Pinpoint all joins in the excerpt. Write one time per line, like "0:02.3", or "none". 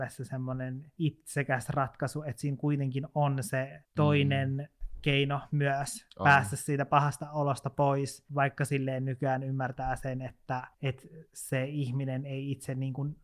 0:10.7